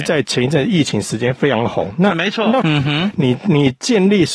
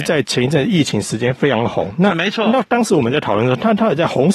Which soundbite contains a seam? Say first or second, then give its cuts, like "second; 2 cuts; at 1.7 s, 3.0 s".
first; 1 cut; at 2.6 s